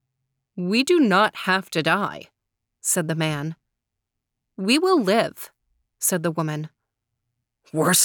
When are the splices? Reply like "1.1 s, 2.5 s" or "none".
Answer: none